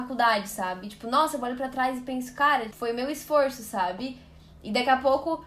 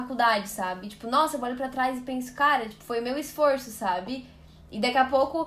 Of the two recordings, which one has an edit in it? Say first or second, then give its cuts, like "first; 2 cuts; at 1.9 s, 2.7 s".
first; 1 cut; at 2.7 s